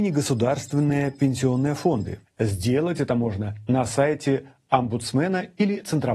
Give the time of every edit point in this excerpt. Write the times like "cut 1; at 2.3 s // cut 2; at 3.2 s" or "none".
cut 1; at 2.2 s